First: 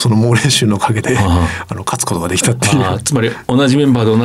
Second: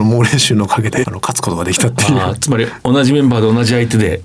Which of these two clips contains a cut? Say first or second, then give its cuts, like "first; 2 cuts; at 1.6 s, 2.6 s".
second; 1 cut; at 1.0 s